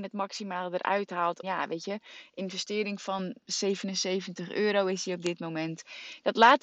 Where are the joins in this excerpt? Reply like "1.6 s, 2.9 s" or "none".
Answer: 1.4 s